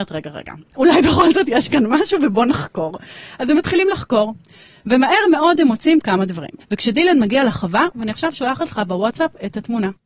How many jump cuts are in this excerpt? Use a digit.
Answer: 2